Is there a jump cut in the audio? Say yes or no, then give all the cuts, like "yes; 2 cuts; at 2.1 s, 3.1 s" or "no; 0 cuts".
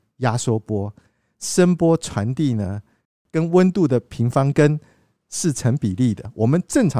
no; 0 cuts